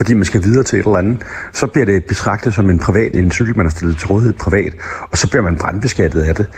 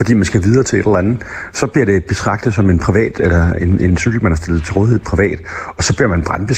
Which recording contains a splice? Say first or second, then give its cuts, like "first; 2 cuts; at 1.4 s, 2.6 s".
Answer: first; 1 cut; at 3.1 s